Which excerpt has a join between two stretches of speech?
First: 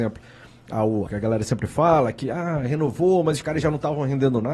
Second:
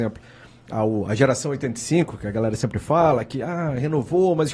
first; 1 cut; at 1.1 s

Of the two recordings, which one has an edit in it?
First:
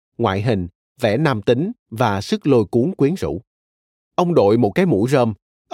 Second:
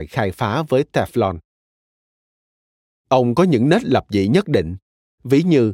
first; 1 cut; at 4.0 s

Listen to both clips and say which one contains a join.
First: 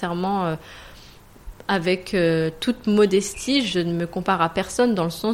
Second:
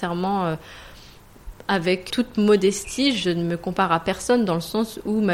second; 1 cut; at 2.1 s

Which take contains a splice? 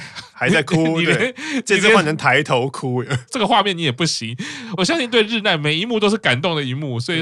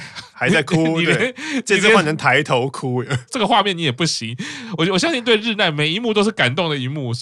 first; 1 cut; at 4.8 s

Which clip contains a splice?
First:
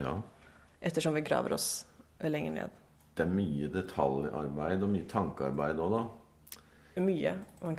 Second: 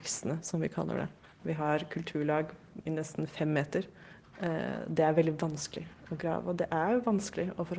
second; 1 cut; at 1.4 s

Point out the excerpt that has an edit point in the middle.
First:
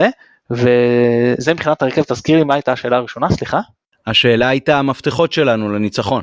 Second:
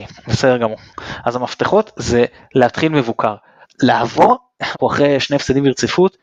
second; 2 cuts; at 3.6 s, 4.7 s

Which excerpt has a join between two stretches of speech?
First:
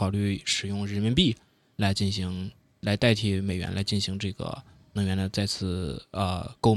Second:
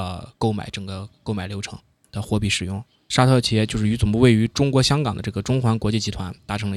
second; 1 cut; at 2.9 s

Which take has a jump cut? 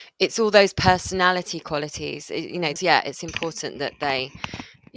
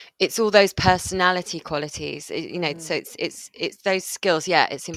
first; 1 cut; at 2.8 s

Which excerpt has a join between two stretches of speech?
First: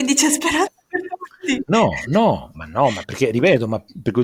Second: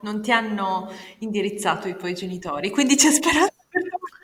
first; 1 cut; at 2.5 s

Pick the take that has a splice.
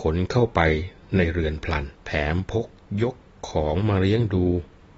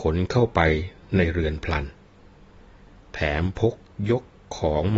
first; 1 cut; at 2.0 s

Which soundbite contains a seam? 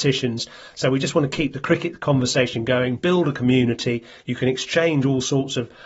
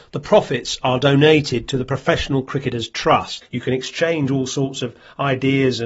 second; 1 cut; at 3.4 s

